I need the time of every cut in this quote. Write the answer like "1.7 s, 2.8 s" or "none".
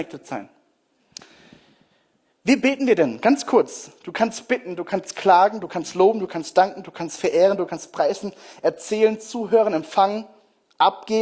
none

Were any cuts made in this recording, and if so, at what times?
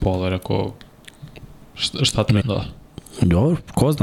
2.4 s

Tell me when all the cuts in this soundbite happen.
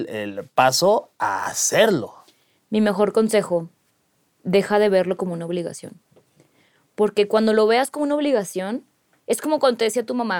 none

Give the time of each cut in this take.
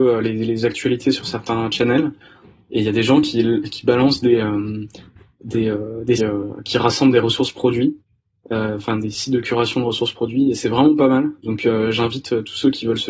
6.2 s

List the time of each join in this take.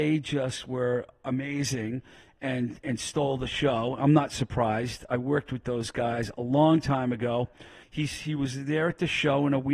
7.8 s

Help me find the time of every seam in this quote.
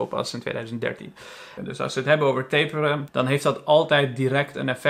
1.6 s, 3.1 s

